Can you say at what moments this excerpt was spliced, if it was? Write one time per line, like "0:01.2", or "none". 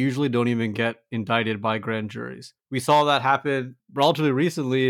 none